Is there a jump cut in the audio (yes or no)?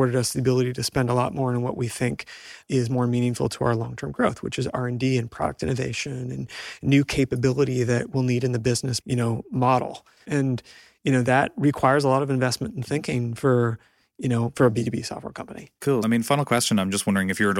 yes